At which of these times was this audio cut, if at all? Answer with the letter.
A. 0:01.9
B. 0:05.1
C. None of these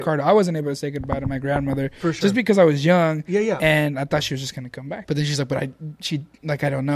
B